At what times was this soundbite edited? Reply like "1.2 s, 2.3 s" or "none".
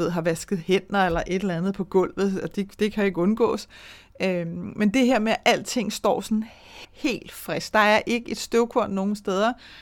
6.8 s